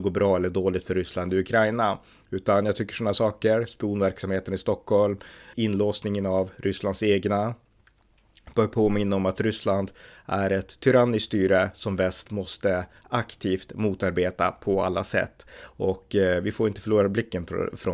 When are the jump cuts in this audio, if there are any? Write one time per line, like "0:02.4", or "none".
0:05.5